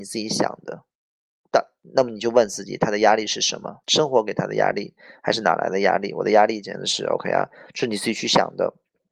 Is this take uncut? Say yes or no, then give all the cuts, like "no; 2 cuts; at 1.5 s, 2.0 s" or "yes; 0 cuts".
no; 1 cut; at 3.8 s